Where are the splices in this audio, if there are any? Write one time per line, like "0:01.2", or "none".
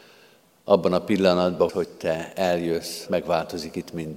0:01.7
0:03.1